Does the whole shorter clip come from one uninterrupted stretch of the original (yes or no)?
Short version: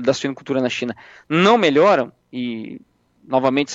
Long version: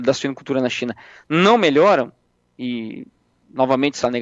no